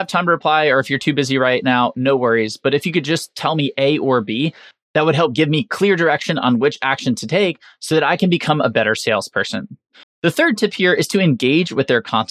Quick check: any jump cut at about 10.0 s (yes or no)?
yes